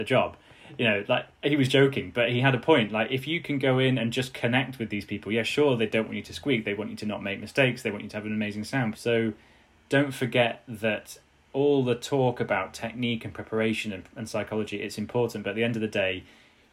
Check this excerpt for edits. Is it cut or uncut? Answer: cut